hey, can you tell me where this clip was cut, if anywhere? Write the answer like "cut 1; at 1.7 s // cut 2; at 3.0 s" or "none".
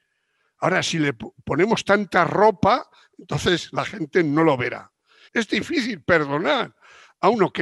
cut 1; at 5.3 s